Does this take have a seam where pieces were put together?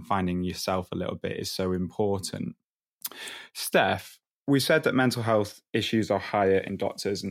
no; 0 cuts

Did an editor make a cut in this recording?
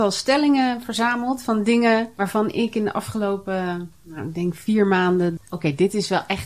yes; 1 cut; at 5.4 s

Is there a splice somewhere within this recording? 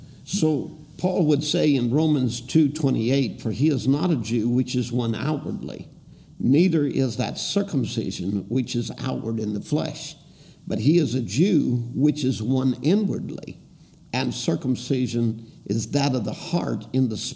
no; 0 cuts

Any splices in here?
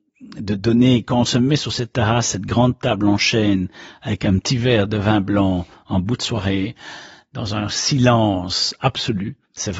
no; 0 cuts

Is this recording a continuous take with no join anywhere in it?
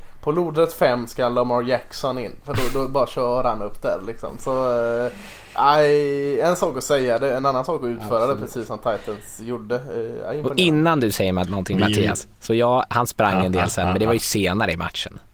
yes; 0 cuts

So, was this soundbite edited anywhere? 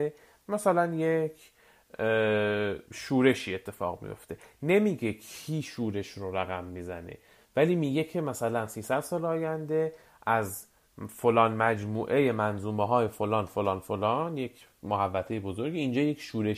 no; 0 cuts

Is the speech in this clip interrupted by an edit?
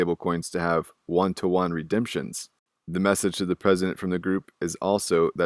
no; 0 cuts

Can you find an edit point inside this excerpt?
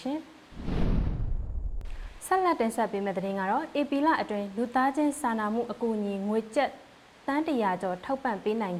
no; 0 cuts

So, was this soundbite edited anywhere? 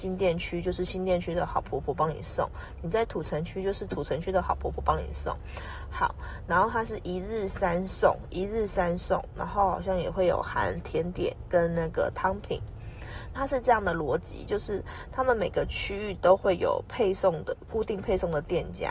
yes; 1 cut; at 13.3 s

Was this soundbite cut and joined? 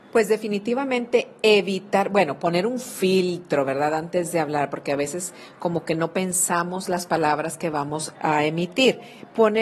yes; 1 cut; at 8.1 s

